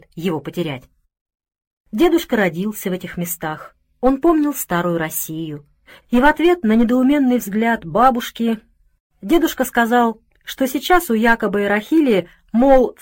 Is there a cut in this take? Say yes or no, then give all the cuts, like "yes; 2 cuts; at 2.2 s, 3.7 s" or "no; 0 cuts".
yes; 1 cut; at 6.0 s